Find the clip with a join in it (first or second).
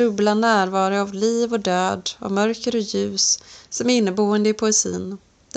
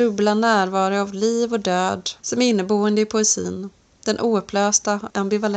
second